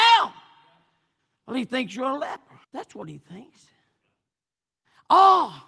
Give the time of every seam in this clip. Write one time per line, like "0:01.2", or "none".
0:02.6

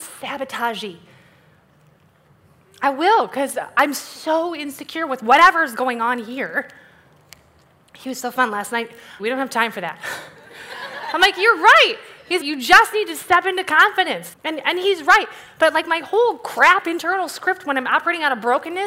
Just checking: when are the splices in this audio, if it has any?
0:09.2
0:12.4
0:14.3

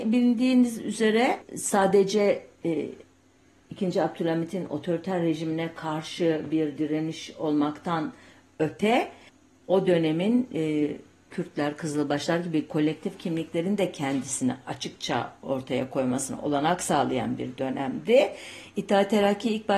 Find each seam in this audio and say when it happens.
0:11.3

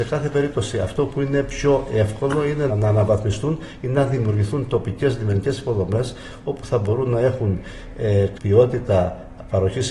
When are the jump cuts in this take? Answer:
0:02.7
0:08.3

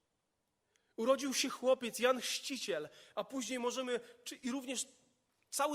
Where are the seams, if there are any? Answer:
none

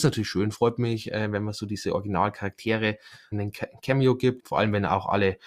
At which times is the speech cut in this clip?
0:03.3
0:04.4

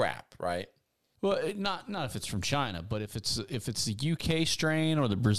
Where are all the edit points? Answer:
0:01.2

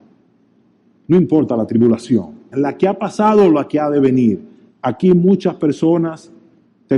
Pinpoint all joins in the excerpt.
0:02.5
0:04.7

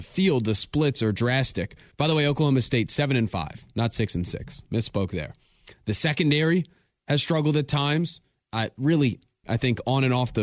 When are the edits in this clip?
0:01.9
0:05.7
0:09.4

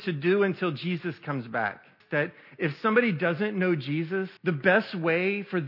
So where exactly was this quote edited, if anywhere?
0:02.0
0:04.4

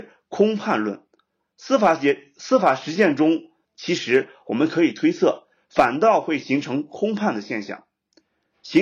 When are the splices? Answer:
0:03.6
0:05.5

